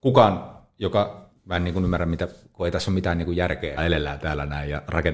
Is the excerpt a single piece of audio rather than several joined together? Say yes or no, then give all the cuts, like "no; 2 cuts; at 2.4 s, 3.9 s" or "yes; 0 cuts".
no; 2 cuts; at 1.4 s, 3.8 s